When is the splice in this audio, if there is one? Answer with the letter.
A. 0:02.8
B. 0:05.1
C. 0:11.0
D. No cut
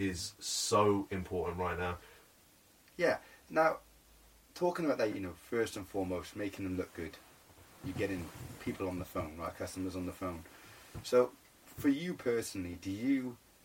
B